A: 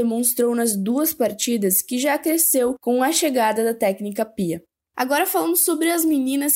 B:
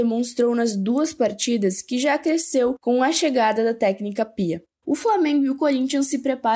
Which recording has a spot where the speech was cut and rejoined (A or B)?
B